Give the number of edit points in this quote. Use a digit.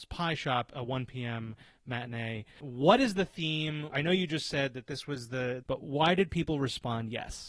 3